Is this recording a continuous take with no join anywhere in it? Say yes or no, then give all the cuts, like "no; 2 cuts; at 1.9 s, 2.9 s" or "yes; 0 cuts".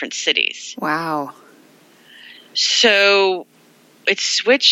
yes; 0 cuts